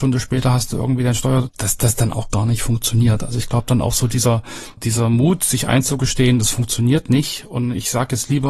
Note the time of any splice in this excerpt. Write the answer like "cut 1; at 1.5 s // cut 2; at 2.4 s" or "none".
cut 1; at 1.5 s // cut 2; at 4.8 s